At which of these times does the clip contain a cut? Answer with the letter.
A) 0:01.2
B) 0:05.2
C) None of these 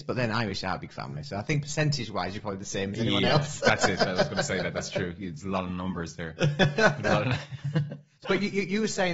C